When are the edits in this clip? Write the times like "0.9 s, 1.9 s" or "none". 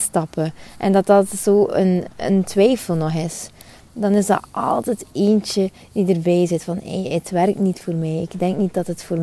none